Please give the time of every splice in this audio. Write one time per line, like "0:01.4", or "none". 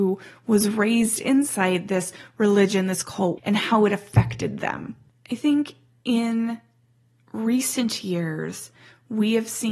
0:03.4